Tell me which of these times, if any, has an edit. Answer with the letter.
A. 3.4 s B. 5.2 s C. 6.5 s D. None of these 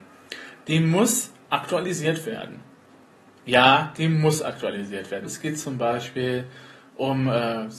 B